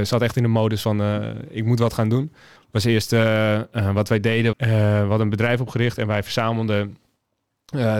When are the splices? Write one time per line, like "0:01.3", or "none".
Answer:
0:02.6
0:04.5